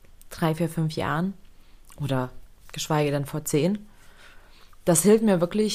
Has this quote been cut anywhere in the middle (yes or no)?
no